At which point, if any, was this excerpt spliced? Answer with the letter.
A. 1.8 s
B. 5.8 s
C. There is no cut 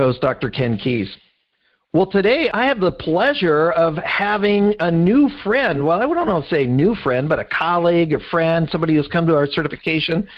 C